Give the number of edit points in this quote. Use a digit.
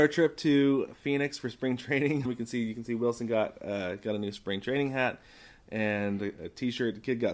1